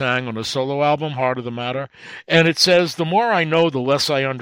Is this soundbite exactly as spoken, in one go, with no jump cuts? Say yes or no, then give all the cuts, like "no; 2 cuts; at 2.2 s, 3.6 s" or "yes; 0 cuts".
yes; 0 cuts